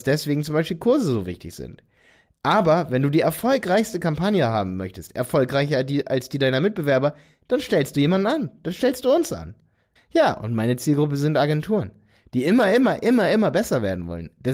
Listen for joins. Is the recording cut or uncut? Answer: cut